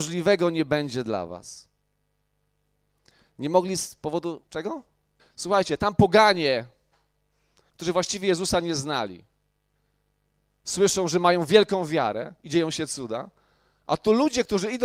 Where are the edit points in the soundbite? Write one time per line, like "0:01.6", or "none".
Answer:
0:05.2

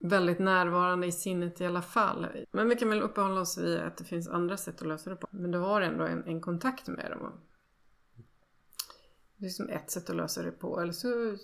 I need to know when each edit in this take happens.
0:02.4
0:05.2

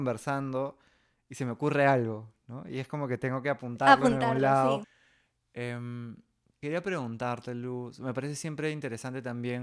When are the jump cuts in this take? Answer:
0:04.8

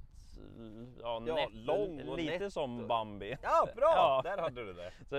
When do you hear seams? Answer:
none

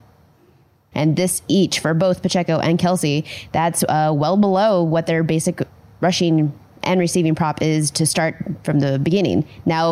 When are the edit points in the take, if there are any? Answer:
0:00.9

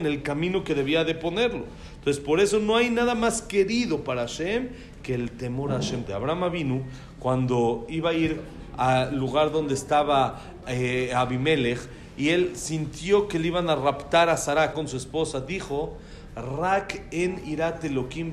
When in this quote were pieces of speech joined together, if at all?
0:06.1
0:14.7

